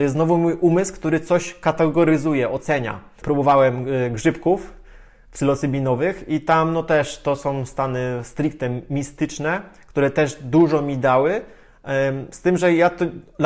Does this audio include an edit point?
yes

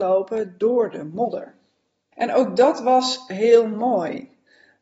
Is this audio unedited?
no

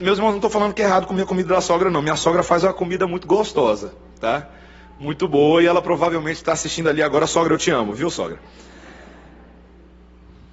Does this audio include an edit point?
no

